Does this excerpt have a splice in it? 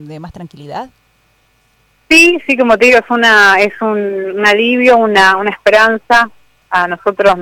no; 0 cuts

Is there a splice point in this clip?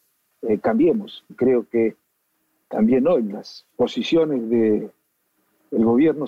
yes; 2 cuts; at 1.3 s, 3.7 s

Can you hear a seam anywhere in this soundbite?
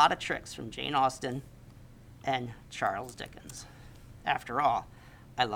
no; 0 cuts

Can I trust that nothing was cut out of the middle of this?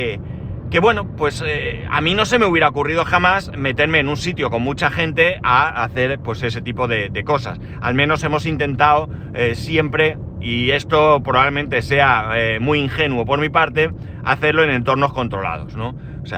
yes; 0 cuts

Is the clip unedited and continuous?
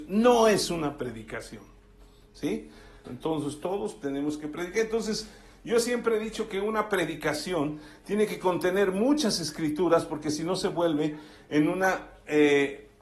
no; 1 cut; at 3.0 s

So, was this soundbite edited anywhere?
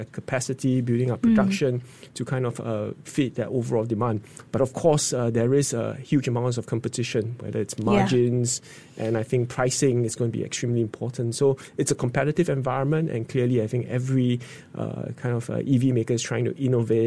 no; 0 cuts

